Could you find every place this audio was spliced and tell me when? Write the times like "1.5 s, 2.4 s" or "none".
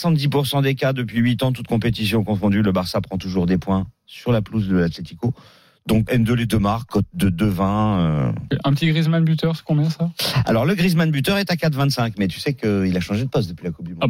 6.1 s